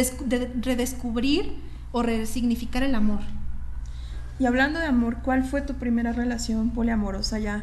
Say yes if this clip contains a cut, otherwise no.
no